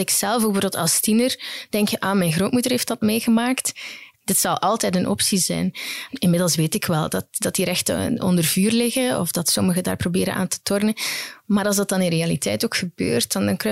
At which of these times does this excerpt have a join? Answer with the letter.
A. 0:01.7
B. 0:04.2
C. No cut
B